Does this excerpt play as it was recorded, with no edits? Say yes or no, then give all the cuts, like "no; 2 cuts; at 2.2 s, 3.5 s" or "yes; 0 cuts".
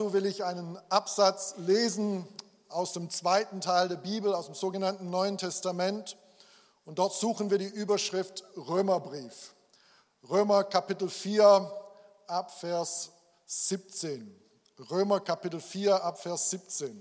yes; 0 cuts